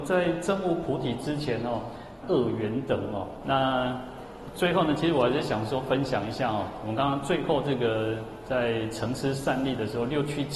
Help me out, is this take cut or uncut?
cut